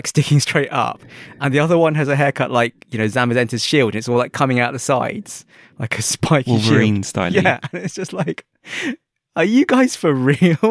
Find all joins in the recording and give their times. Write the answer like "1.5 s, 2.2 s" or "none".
none